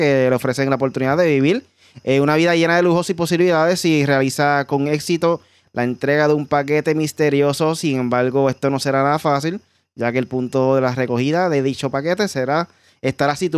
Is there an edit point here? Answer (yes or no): no